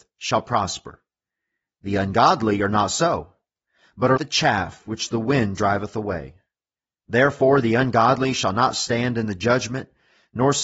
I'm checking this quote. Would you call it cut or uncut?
cut